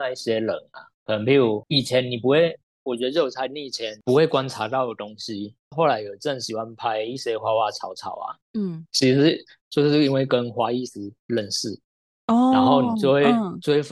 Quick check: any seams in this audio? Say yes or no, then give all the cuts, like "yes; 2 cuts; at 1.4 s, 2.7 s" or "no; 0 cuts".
yes; 1 cut; at 1.0 s